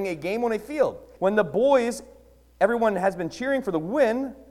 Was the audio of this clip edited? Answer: yes; 1 cut; at 1.2 s

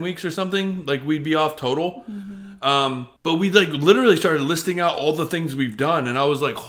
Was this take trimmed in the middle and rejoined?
yes; 1 cut; at 3.2 s

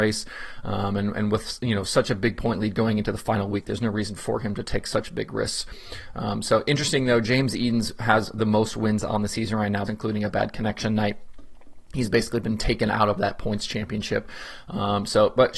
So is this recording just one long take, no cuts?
no; 1 cut; at 9.9 s

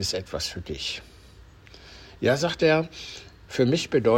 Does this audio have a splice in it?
no; 0 cuts

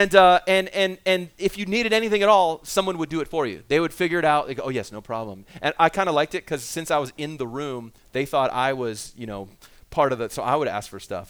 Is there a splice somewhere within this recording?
no; 0 cuts

